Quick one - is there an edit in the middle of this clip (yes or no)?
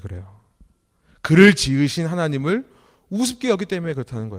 no